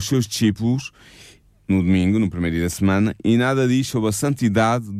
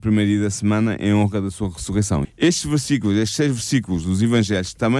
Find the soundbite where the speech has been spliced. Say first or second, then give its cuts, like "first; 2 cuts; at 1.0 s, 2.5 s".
second; 1 cut; at 2.2 s